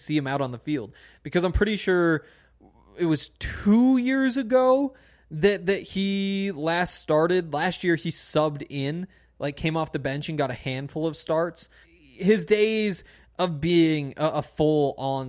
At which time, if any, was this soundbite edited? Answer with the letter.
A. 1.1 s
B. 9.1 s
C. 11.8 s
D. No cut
C